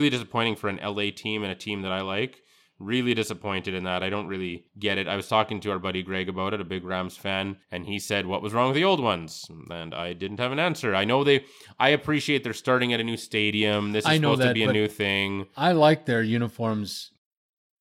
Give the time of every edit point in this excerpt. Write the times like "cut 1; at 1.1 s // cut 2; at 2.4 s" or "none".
cut 1; at 4.7 s // cut 2; at 7.6 s